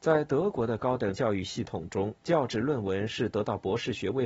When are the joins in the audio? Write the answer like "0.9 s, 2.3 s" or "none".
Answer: 2.2 s